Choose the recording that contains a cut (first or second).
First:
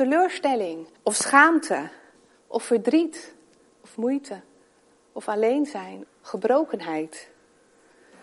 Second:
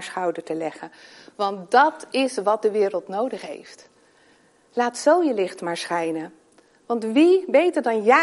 first